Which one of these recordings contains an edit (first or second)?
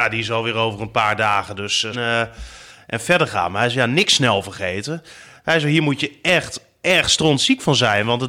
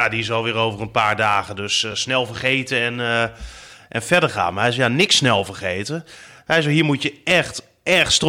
first